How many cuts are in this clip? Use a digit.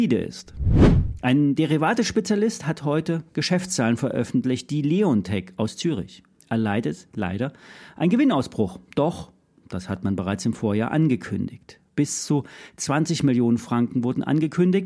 0